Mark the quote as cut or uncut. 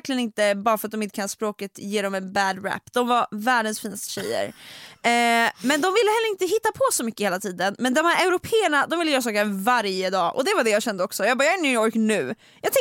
uncut